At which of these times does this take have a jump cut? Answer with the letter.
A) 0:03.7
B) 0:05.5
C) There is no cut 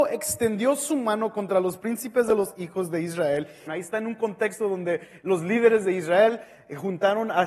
A